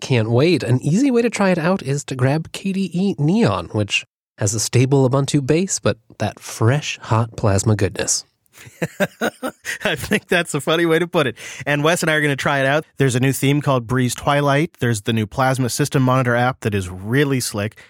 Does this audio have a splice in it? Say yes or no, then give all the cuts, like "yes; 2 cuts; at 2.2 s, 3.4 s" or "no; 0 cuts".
yes; 1 cut; at 12.8 s